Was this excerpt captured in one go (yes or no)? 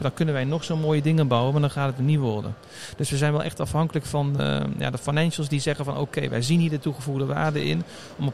yes